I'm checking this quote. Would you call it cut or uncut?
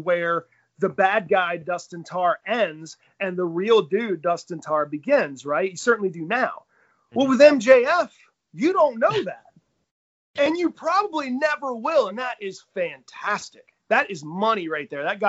uncut